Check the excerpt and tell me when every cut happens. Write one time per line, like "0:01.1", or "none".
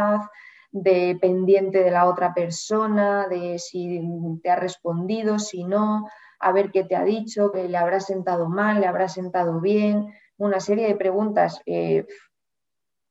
0:07.5